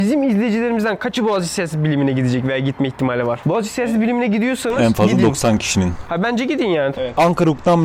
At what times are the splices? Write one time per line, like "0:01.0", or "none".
0:06.9